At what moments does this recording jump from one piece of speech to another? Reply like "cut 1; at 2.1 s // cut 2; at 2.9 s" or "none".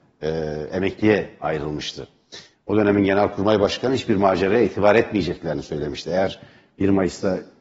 none